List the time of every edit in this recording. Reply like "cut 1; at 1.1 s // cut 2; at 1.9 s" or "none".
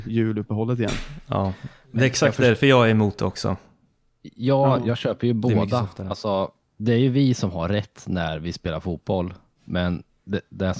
none